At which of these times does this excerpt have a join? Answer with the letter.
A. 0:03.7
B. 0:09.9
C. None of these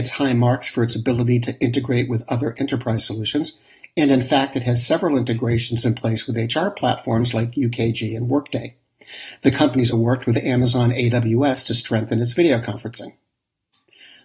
B